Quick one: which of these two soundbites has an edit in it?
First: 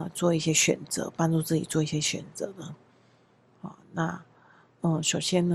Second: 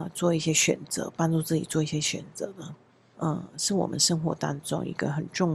second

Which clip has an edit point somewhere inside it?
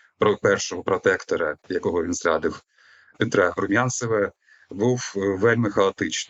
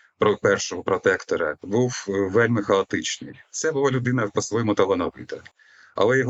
second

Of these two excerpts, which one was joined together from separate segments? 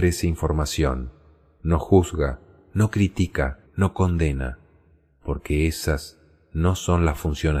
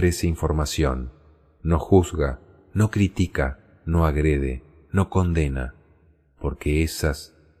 first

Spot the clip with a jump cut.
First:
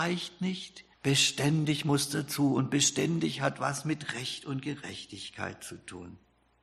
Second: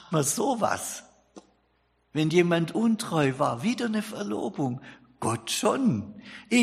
first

